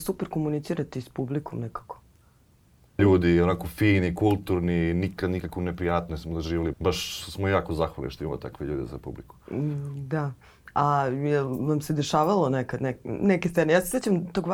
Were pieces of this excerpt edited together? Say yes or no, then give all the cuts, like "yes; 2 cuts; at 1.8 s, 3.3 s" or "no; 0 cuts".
yes; 2 cuts; at 3.0 s, 6.7 s